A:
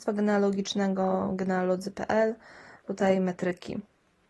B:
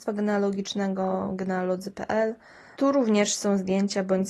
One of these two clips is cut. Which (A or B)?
B